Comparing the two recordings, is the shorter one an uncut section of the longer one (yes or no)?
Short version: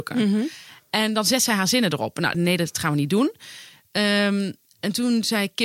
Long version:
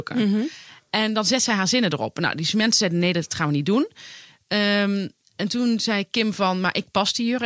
no